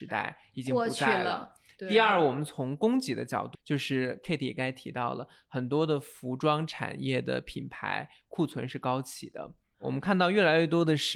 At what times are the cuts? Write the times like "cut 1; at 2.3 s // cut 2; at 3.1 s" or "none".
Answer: cut 1; at 3.5 s // cut 2; at 9.7 s

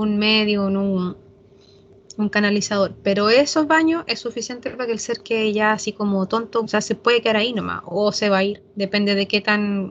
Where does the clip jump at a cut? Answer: cut 1; at 6.6 s

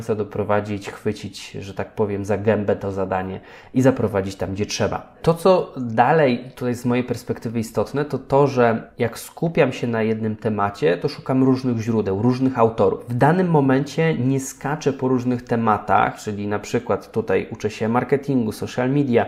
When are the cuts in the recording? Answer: none

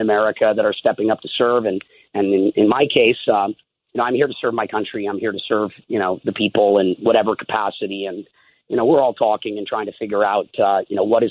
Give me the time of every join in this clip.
none

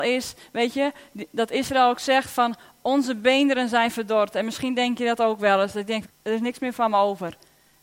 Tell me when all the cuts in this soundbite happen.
cut 1; at 6.0 s

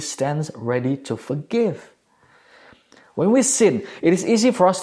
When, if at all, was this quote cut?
none

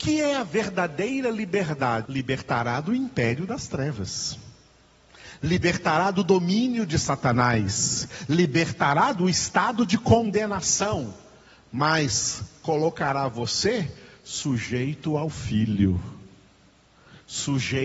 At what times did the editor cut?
cut 1; at 2.1 s

